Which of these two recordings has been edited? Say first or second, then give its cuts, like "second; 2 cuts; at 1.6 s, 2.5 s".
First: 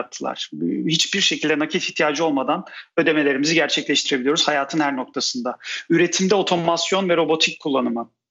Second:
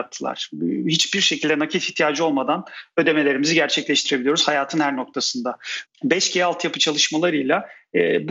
second; 1 cut; at 5.8 s